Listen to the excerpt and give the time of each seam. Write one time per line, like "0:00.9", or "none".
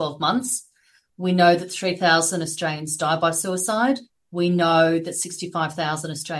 none